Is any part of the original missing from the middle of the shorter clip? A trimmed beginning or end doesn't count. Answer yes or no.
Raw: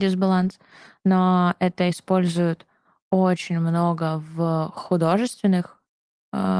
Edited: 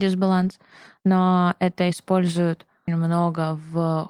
yes